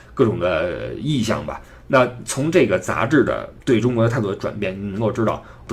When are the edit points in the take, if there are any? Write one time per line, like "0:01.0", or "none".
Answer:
0:03.6